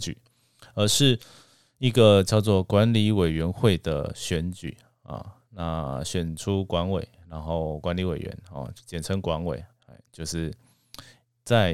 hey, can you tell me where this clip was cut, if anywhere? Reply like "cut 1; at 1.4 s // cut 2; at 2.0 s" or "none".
cut 1; at 7.8 s // cut 2; at 9.7 s